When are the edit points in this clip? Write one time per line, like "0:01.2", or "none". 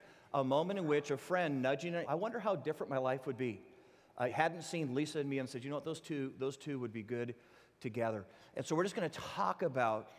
0:02.0
0:04.3

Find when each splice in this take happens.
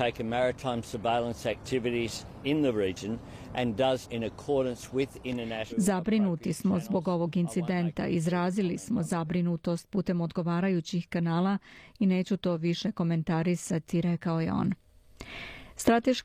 0:04.0
0:05.7

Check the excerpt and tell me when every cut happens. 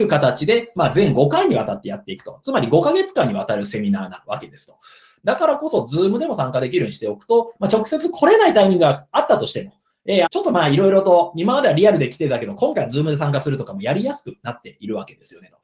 0:05.2
0:10.3

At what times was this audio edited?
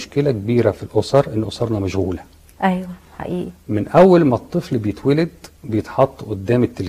none

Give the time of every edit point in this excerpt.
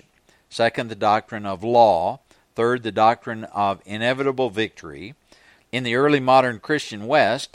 0:05.6

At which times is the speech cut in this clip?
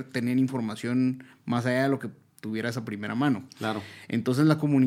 none

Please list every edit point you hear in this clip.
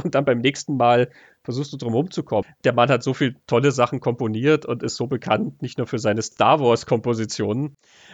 0:02.4

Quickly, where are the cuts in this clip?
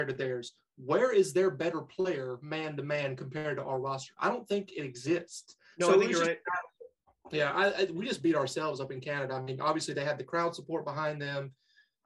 none

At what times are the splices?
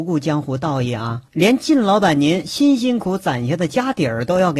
0:01.3
0:03.0

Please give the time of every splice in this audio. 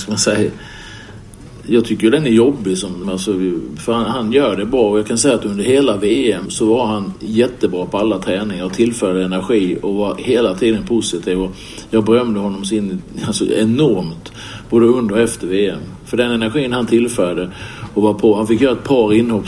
0:03.0
0:06.5

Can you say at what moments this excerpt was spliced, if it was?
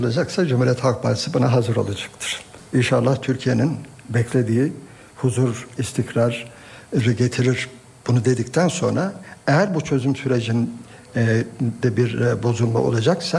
0:05.7

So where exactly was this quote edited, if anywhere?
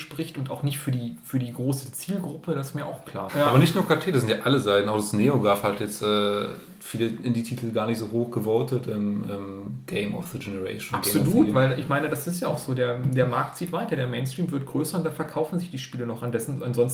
0:03.3

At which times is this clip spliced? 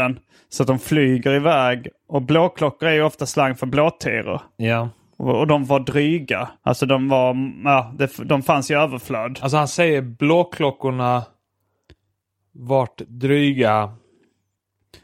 0:06.6

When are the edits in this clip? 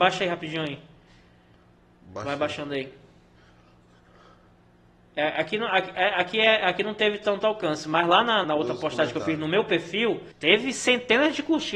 0:08.4
0:10.3

